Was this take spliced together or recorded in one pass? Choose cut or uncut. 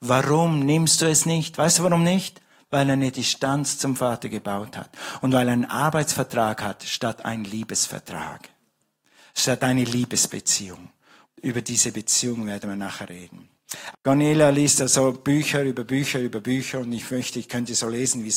cut